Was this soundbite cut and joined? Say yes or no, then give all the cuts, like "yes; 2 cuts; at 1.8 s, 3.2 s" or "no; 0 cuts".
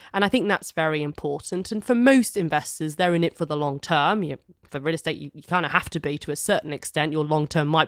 no; 0 cuts